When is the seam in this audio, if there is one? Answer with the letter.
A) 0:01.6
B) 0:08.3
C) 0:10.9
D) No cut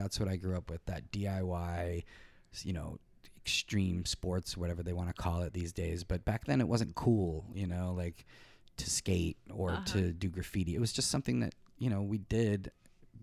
D